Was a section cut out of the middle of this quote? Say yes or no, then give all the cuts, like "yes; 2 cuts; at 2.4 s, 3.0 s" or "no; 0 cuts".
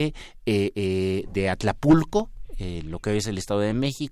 no; 0 cuts